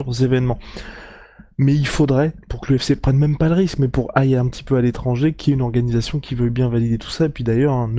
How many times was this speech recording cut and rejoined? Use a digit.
0